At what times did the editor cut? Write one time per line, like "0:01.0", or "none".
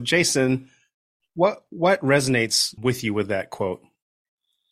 0:02.8